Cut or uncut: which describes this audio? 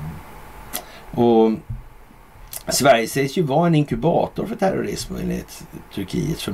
cut